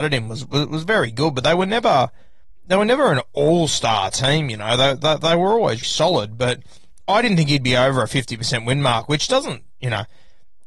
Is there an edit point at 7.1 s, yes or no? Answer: no